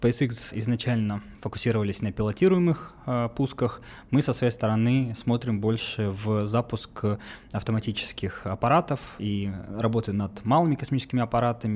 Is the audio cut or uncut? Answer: uncut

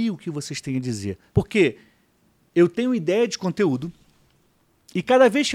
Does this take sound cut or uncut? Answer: cut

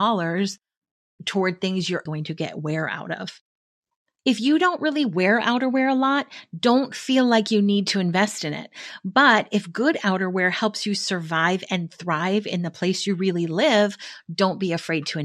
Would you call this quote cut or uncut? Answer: cut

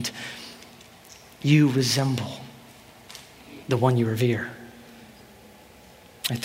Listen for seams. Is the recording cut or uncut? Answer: cut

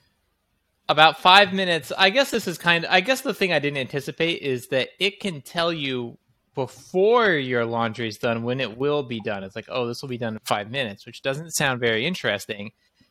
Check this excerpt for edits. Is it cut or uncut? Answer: uncut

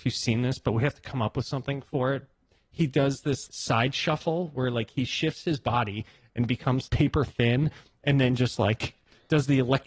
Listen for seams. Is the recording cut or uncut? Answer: cut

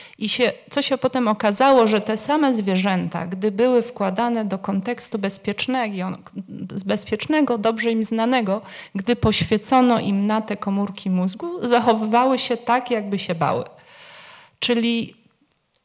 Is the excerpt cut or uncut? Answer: uncut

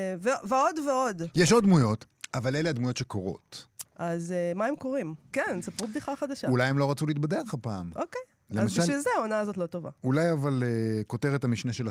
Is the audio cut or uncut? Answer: cut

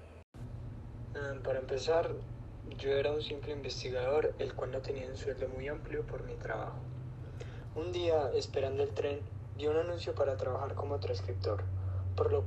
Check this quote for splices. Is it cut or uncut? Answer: uncut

